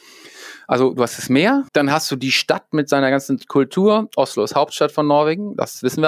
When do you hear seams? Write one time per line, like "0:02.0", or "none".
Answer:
0:01.7